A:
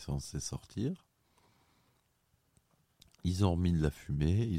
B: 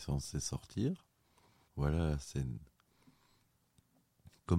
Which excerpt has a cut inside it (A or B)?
B